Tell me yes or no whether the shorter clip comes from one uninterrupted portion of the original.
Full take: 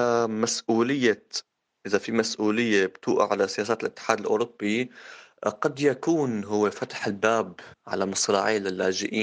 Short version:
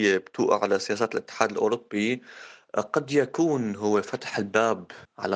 yes